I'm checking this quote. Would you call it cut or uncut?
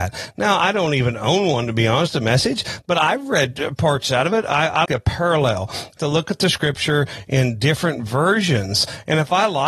cut